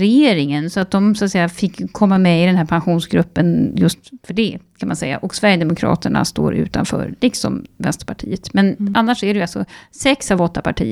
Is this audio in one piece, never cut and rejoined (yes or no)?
yes